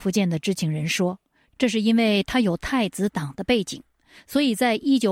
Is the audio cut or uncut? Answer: uncut